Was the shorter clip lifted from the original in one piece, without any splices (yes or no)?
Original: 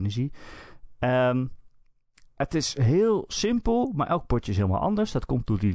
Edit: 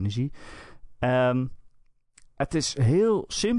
yes